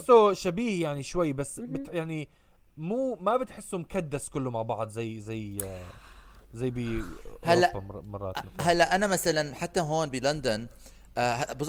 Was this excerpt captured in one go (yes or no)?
yes